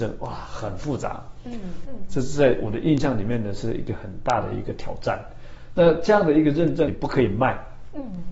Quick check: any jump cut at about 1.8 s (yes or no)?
yes